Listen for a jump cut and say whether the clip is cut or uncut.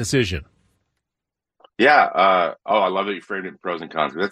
uncut